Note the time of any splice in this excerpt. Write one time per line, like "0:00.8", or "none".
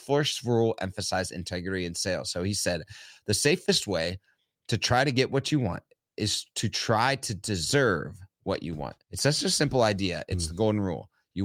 0:09.0